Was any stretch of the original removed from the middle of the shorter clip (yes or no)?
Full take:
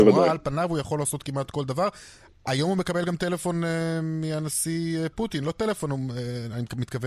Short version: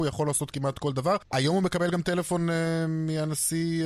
yes